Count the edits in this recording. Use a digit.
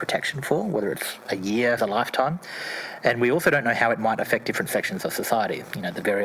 1